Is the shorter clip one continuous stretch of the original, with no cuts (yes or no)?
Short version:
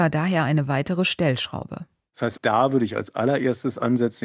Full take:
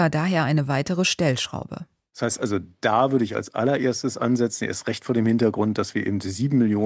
no